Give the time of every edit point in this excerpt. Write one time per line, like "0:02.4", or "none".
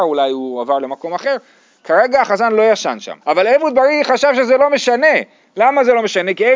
0:03.2